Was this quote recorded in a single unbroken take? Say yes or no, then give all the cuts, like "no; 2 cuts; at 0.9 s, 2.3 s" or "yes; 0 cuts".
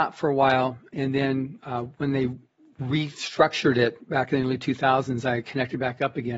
yes; 0 cuts